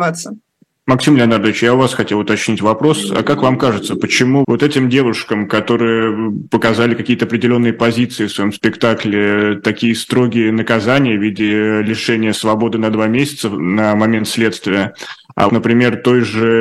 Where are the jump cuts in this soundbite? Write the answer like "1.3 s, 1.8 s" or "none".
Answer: 4.4 s, 15.5 s

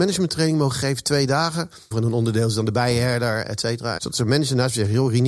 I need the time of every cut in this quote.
1.9 s, 4.0 s

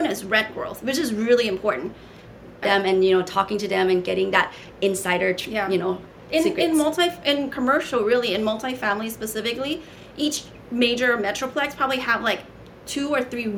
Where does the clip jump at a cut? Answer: 2.6 s

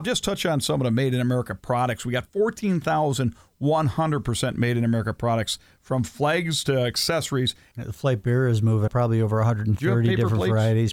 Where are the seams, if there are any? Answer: 7.7 s, 8.9 s

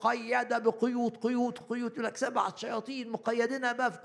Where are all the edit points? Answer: 1.6 s

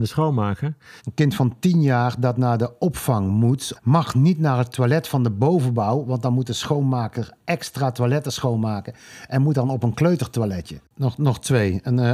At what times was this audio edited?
1.0 s, 3.7 s, 10.8 s

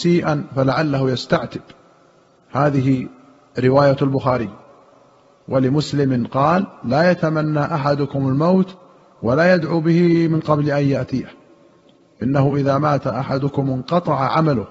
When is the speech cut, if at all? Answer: none

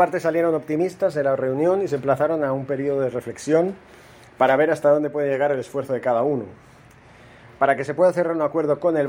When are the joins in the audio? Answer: none

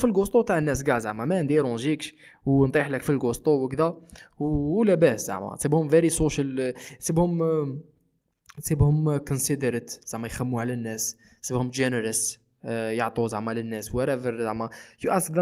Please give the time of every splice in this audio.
none

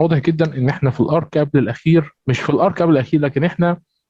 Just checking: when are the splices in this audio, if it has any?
2.2 s

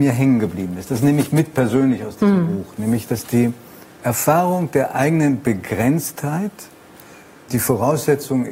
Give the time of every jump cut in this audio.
7.5 s

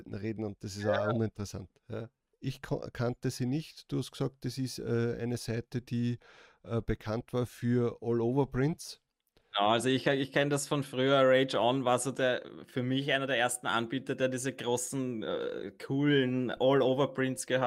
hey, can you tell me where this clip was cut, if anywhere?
2.3 s

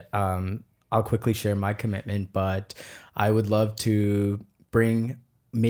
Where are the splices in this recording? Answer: none

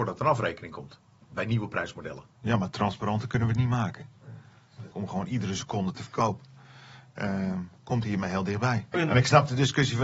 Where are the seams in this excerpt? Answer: 2.3 s, 4.9 s, 8.9 s

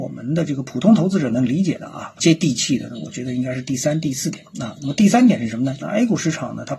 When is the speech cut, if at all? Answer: 5.8 s

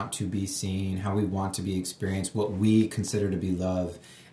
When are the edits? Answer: none

